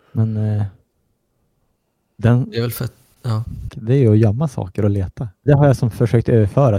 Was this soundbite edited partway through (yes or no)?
yes